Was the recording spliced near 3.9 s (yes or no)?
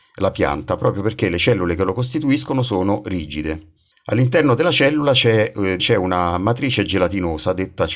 no